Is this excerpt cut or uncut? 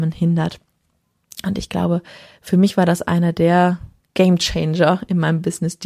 uncut